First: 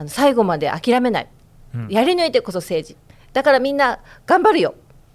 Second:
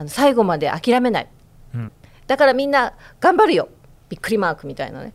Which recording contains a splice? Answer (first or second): second